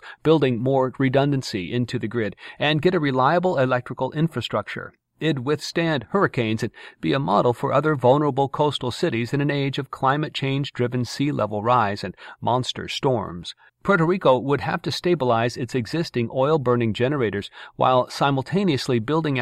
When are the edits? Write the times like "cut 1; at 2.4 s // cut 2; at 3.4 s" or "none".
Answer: cut 1; at 13.7 s